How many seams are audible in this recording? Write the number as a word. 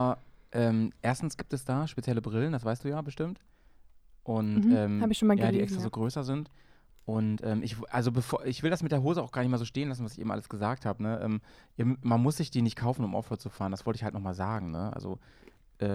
zero